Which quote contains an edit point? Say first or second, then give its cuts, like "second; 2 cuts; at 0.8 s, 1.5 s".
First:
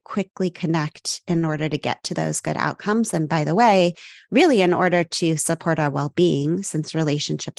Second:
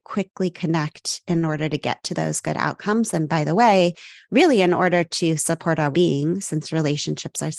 second; 1 cut; at 5.9 s